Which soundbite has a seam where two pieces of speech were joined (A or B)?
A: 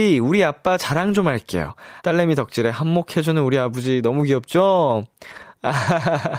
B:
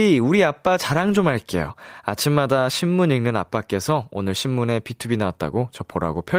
A